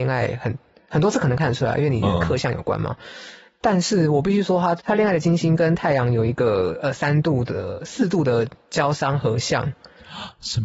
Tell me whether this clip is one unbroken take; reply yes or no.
no